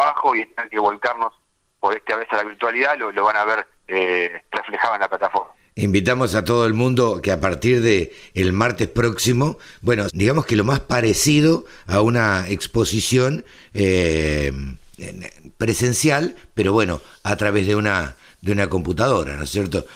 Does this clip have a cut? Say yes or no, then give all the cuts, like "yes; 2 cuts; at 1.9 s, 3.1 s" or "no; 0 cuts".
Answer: yes; 2 cuts; at 3.8 s, 10.1 s